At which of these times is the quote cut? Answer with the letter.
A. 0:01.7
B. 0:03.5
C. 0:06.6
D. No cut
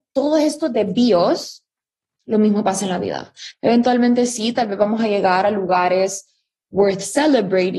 B